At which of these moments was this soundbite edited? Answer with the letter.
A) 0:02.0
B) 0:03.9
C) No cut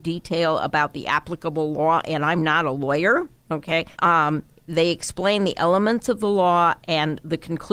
B